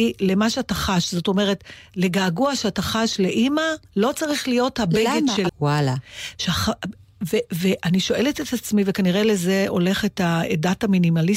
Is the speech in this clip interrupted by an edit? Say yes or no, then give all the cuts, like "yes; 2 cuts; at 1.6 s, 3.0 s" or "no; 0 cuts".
yes; 1 cut; at 5.5 s